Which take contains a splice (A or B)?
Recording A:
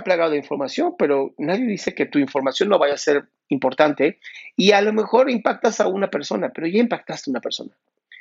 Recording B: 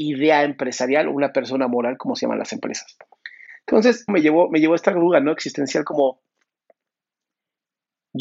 B